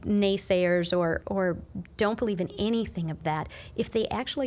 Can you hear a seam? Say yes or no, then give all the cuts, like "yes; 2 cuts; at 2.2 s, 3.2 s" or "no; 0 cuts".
yes; 1 cut; at 1.2 s